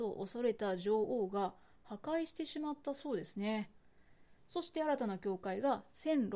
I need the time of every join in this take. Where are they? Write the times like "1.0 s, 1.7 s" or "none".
none